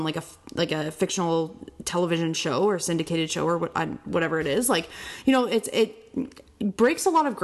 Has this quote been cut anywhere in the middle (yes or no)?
no